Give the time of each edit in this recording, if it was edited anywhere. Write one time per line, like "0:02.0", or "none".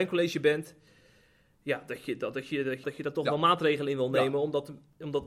0:02.8